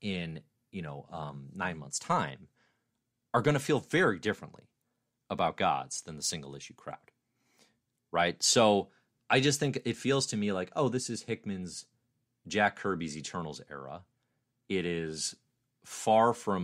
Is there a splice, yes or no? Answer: no